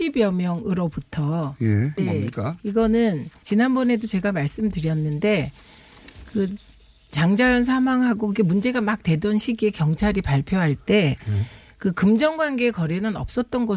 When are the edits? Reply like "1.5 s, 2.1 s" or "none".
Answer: 2.0 s